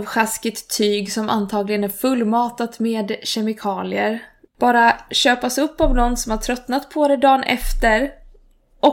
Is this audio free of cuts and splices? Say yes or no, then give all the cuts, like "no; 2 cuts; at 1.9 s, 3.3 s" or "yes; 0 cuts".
no; 1 cut; at 4.4 s